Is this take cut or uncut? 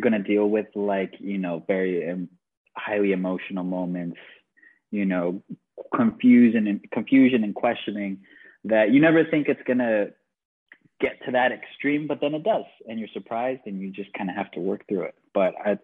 uncut